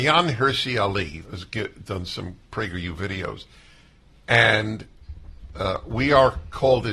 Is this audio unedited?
no; 1 cut; at 1.2 s

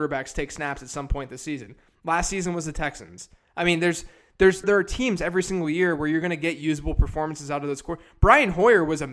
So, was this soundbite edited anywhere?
yes; 1 cut; at 4.6 s

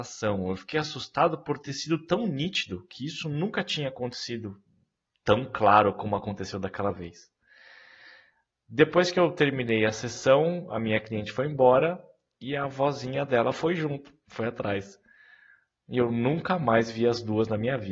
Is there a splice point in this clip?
no; 0 cuts

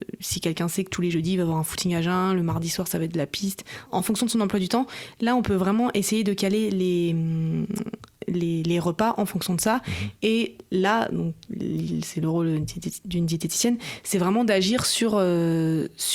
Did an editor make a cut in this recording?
yes; 1 cut; at 3.9 s

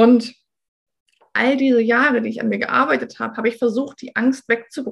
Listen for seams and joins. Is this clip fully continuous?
yes; 0 cuts

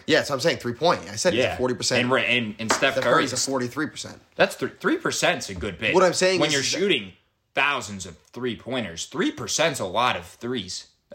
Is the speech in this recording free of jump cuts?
yes; 0 cuts

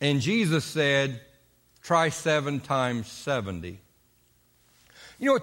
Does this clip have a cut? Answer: no; 0 cuts

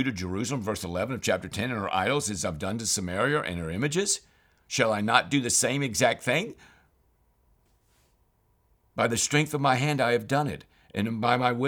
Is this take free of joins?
yes; 0 cuts

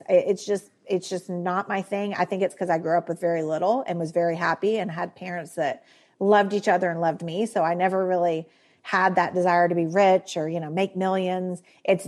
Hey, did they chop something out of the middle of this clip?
no; 0 cuts

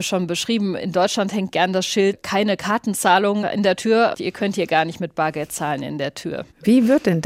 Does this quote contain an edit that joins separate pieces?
yes; 1 cut; at 4.1 s

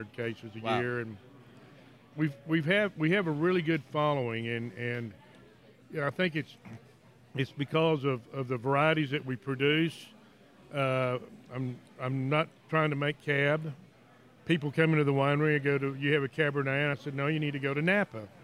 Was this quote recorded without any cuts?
yes; 0 cuts

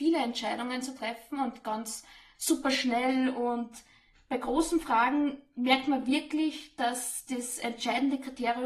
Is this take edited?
no; 0 cuts

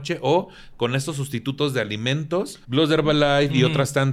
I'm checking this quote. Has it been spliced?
yes; 1 cut; at 2.6 s

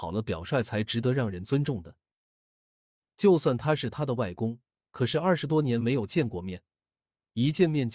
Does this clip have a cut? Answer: no; 0 cuts

